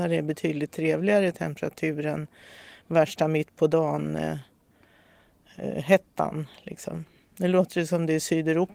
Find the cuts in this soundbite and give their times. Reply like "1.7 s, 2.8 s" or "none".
none